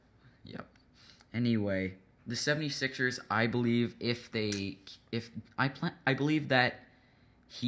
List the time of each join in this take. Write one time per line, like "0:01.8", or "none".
0:02.2